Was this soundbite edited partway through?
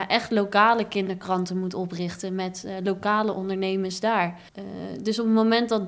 yes; 1 cut; at 4.5 s

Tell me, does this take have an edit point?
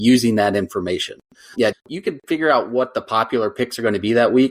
yes; 1 cut; at 1.7 s

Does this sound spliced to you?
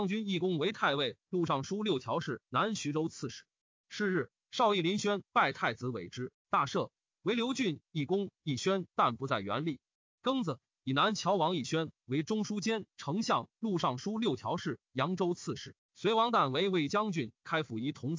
no; 0 cuts

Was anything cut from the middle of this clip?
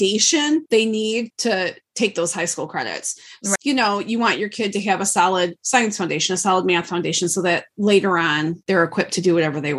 yes; 1 cut; at 3.6 s

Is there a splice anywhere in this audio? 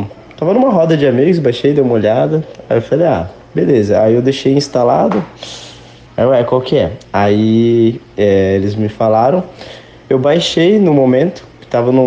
yes; 1 cut; at 6.1 s

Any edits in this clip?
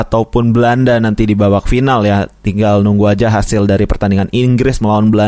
no; 0 cuts

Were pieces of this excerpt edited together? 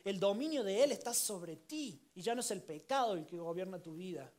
yes; 1 cut; at 2.1 s

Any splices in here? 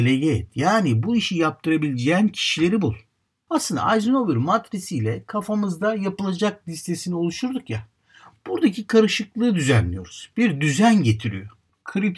yes; 1 cut; at 3.5 s

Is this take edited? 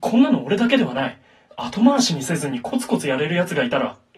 yes; 1 cut; at 1.5 s

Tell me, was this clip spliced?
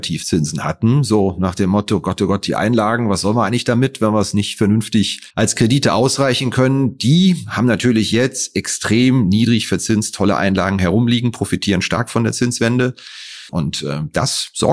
yes; 2 cuts; at 5.3 s, 13.5 s

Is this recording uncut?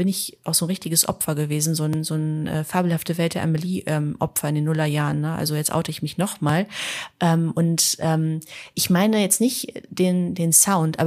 yes; 0 cuts

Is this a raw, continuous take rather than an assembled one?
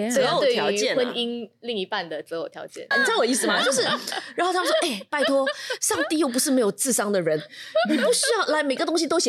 no; 1 cut; at 2.9 s

